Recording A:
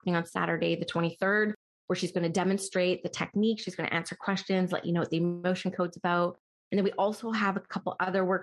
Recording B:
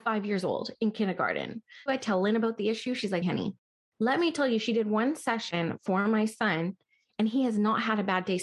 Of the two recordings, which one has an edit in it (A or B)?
B